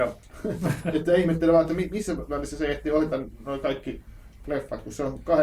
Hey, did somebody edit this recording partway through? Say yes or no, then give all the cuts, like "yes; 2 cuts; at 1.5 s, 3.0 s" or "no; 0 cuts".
no; 0 cuts